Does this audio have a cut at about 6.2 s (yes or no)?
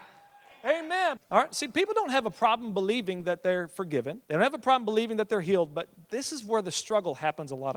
no